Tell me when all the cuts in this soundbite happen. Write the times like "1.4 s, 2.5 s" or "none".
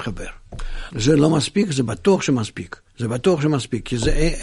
0.9 s, 2.9 s